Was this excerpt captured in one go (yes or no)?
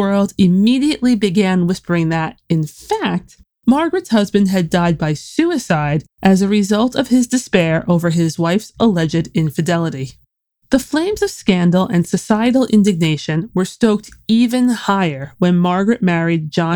yes